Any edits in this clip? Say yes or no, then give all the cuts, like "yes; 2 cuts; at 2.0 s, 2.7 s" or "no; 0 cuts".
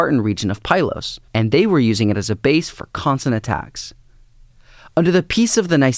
yes; 1 cut; at 1.3 s